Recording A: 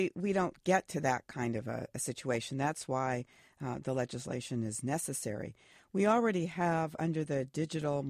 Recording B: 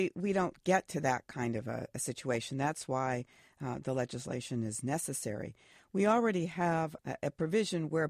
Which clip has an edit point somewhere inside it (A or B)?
B